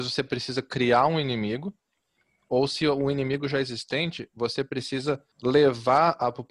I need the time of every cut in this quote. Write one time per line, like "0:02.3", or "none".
0:05.3